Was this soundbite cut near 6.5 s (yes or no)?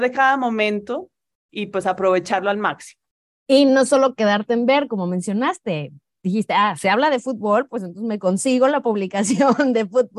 no